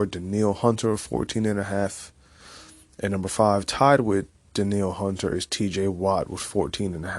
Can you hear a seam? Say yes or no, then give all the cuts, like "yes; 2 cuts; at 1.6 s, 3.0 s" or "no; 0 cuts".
no; 0 cuts